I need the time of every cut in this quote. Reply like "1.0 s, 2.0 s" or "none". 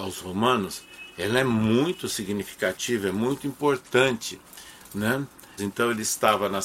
5.6 s